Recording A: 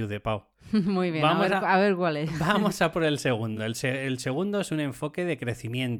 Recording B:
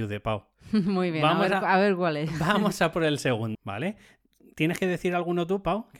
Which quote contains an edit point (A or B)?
B